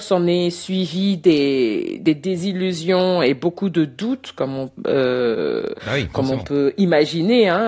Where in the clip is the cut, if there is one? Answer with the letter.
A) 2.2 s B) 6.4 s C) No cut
C